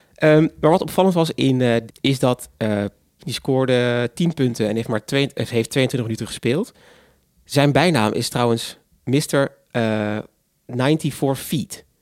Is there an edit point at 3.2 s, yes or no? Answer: yes